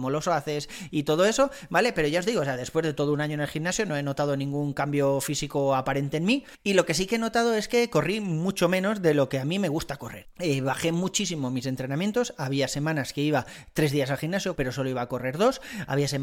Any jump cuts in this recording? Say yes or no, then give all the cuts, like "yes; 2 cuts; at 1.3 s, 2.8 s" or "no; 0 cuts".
yes; 1 cut; at 14.6 s